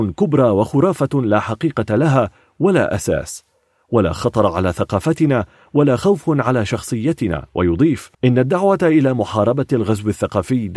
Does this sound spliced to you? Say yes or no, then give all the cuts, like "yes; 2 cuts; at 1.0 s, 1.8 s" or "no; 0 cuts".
yes; 1 cut; at 8.1 s